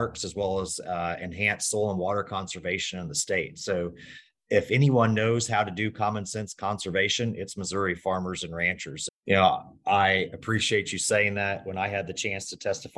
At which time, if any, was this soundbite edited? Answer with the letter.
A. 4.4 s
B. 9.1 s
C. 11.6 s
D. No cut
B